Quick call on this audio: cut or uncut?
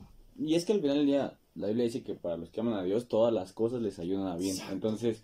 cut